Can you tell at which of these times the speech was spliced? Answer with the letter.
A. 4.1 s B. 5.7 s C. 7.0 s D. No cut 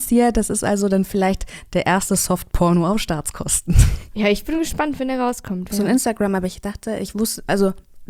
B